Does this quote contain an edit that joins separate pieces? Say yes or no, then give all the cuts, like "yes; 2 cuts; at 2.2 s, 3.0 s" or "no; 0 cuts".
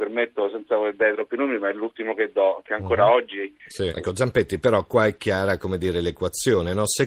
yes; 2 cuts; at 2.6 s, 3.9 s